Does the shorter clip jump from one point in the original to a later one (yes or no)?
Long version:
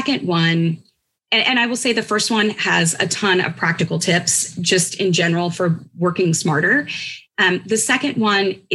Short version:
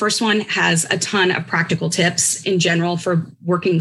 yes